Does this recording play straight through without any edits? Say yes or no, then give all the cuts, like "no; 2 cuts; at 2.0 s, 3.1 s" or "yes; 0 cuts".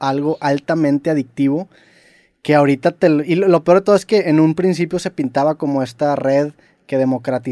yes; 0 cuts